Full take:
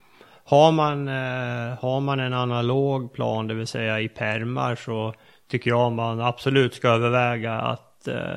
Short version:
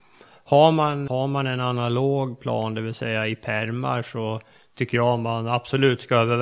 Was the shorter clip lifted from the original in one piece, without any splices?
no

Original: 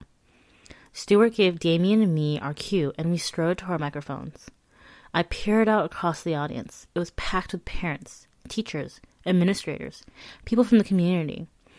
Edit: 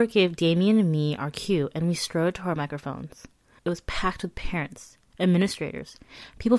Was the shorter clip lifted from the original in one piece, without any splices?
no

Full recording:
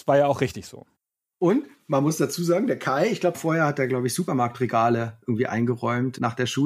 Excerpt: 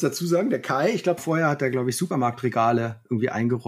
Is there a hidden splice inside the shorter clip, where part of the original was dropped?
no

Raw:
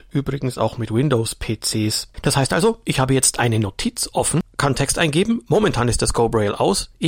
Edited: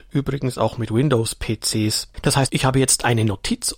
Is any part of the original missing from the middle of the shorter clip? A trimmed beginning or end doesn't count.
yes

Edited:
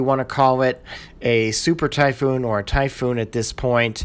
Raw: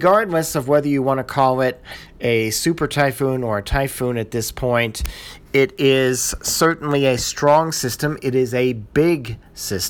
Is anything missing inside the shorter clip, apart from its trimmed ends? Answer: no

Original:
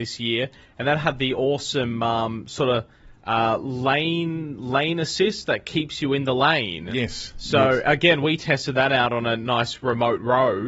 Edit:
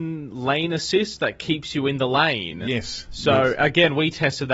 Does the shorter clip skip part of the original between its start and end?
no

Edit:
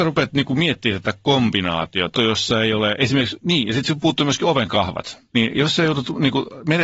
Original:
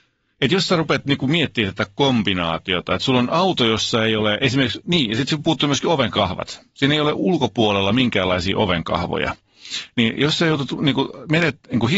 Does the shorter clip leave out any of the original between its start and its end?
yes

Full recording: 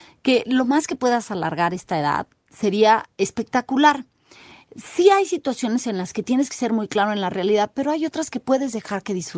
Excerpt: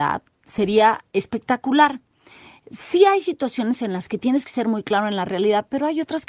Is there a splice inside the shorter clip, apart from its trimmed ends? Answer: no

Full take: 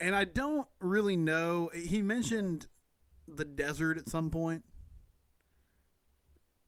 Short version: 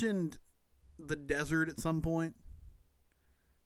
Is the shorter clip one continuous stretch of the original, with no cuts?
yes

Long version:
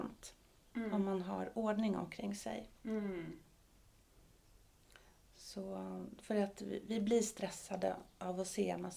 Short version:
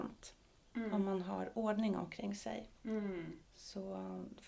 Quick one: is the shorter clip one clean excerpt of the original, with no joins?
no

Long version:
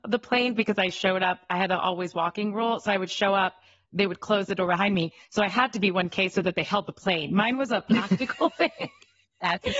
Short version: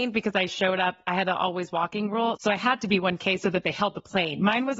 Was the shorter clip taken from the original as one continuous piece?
no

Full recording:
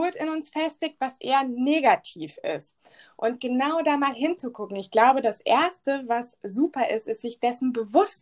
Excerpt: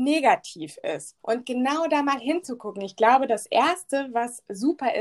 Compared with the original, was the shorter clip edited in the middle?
yes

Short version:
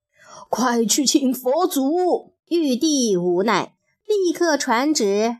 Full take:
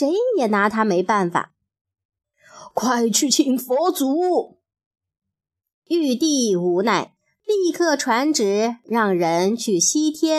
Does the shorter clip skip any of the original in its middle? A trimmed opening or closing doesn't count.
yes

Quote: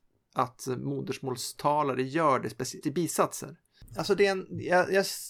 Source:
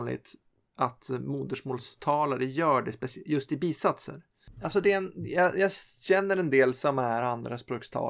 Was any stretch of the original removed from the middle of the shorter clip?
yes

